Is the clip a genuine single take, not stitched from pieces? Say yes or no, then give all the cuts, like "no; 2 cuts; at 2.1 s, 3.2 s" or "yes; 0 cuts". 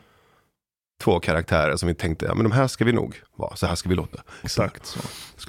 no; 1 cut; at 4.4 s